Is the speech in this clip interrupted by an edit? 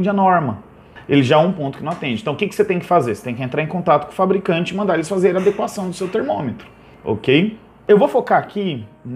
no; 0 cuts

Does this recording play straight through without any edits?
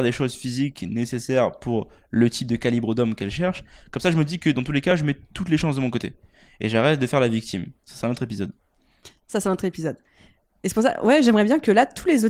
yes; 0 cuts

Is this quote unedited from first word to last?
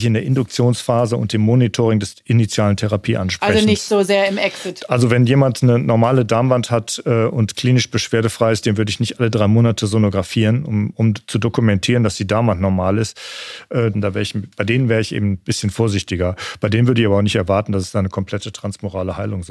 no; 1 cut; at 13.9 s

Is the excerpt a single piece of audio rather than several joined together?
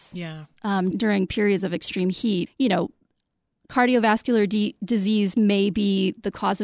no; 2 cuts; at 0.9 s, 2.5 s

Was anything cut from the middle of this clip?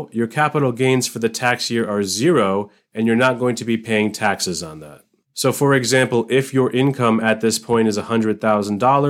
yes; 1 cut; at 5.2 s

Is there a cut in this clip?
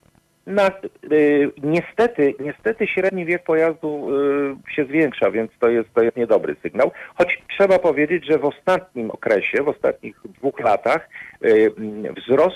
no; 0 cuts

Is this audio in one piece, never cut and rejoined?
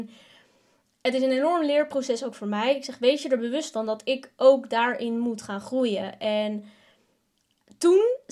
yes; 0 cuts

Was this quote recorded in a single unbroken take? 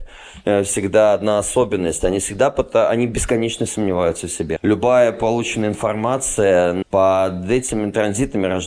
no; 2 cuts; at 4.6 s, 6.8 s

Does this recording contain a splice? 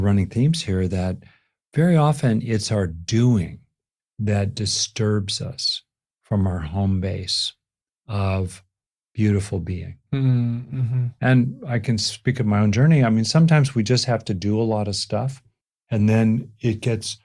no; 0 cuts

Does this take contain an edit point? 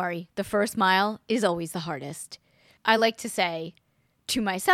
no; 0 cuts

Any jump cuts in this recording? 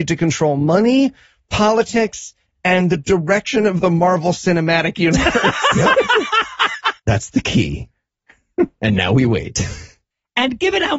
yes; 1 cut; at 7.0 s

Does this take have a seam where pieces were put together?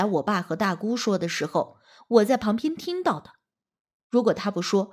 no; 0 cuts

